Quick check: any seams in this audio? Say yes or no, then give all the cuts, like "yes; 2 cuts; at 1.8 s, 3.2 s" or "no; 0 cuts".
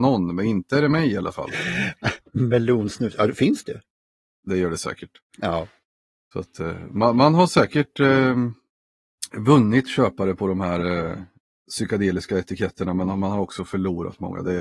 no; 0 cuts